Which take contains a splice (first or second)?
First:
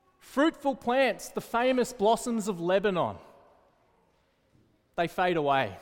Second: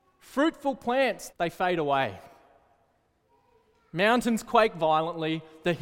second